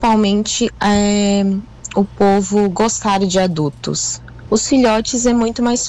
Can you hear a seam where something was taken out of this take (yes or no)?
yes